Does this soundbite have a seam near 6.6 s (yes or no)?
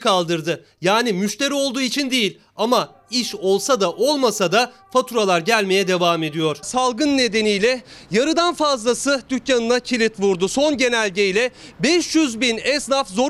yes